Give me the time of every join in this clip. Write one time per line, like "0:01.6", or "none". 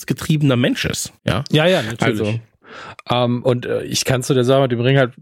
0:01.2